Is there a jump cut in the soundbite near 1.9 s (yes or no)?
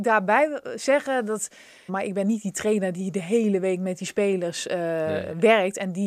yes